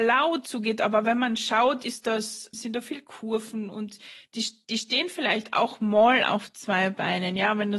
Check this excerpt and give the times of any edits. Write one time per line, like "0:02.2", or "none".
0:02.5

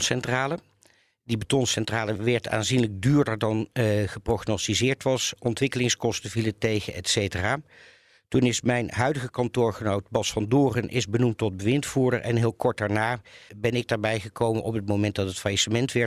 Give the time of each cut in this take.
0:13.5

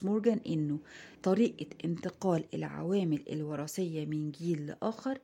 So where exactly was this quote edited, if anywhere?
0:01.1

